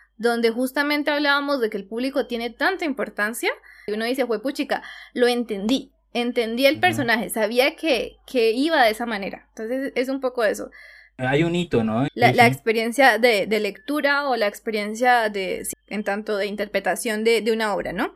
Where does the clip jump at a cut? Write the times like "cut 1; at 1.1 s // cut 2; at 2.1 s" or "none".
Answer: cut 1; at 3.9 s // cut 2; at 12.1 s // cut 3; at 15.7 s

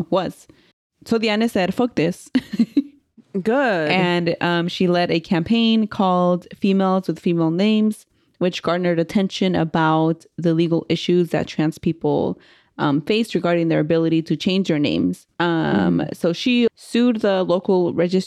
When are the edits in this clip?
cut 1; at 15.3 s // cut 2; at 16.7 s

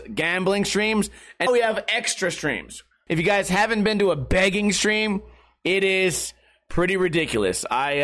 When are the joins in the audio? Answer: cut 1; at 1.5 s // cut 2; at 3.1 s

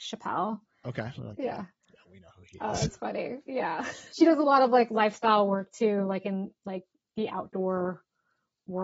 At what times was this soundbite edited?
cut 1; at 1.2 s // cut 2; at 4.1 s

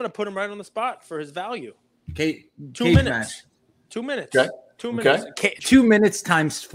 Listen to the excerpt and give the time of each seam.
cut 1; at 5.6 s

